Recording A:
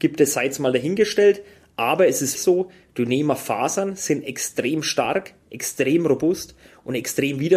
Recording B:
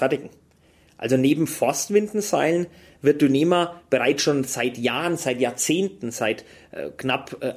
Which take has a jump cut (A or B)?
A